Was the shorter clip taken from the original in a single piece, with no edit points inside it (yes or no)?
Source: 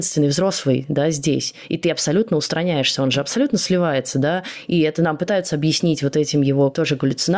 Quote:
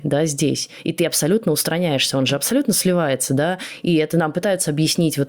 yes